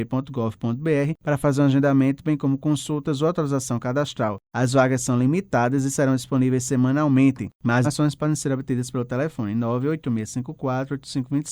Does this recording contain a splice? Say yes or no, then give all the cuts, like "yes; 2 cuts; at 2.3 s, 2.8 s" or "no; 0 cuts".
yes; 1 cut; at 7.8 s